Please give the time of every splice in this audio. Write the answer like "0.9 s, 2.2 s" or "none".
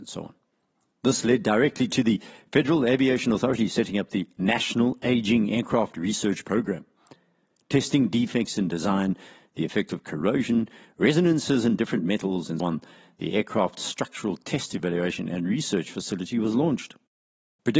12.6 s